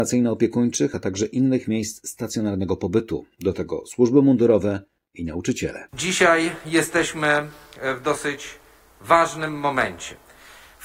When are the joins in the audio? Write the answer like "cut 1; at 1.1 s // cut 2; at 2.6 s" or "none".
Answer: none